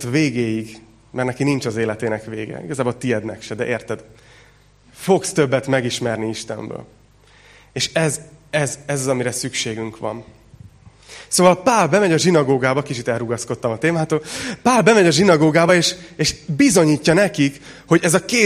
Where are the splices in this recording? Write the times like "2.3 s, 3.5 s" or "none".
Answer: none

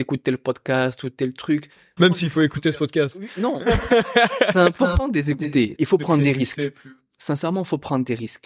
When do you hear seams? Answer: 2.0 s, 5.8 s

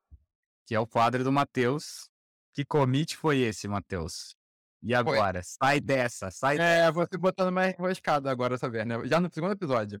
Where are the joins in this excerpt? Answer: none

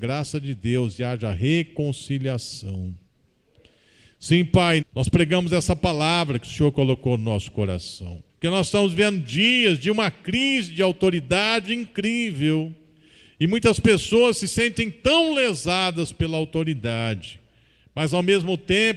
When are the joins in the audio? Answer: 4.8 s, 8.3 s

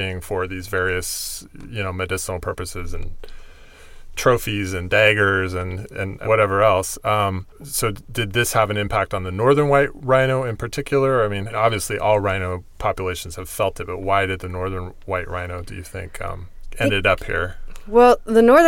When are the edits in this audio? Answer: 7.5 s

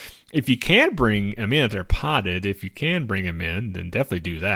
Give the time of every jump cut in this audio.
none

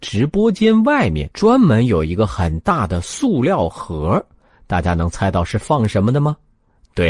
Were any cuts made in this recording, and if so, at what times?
1.3 s

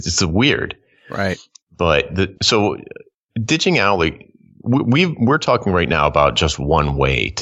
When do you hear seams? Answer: 2.3 s

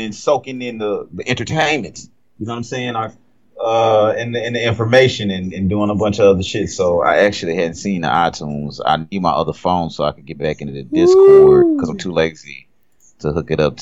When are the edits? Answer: none

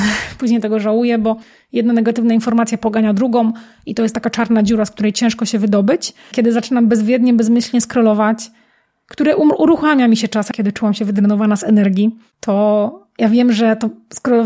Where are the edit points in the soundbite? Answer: 6.3 s, 10.5 s

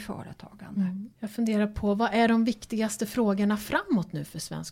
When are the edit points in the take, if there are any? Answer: 1.1 s

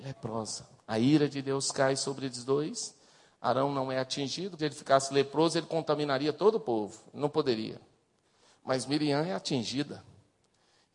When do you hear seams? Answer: 4.6 s

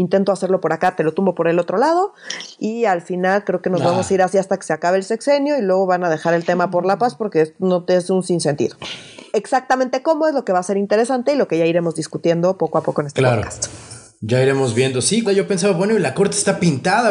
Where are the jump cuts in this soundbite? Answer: 9.3 s, 15.2 s

